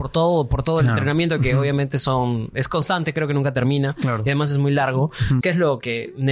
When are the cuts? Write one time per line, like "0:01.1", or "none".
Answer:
0:05.4